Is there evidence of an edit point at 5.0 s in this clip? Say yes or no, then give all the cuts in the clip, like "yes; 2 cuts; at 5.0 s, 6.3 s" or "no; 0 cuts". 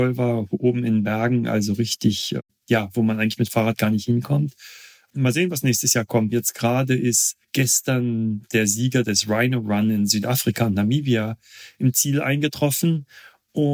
no; 2 cuts; at 6.3 s, 7.4 s